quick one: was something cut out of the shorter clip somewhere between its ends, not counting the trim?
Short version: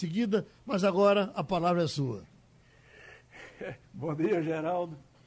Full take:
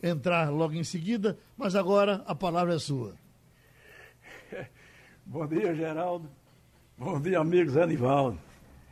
yes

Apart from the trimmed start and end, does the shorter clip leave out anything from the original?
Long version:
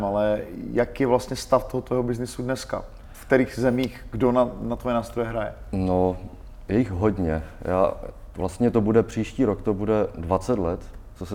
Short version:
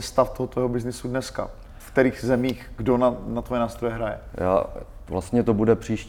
yes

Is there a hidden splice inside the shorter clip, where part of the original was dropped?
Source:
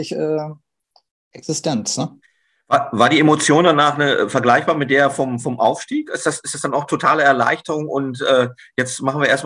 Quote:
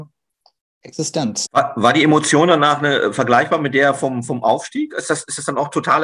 yes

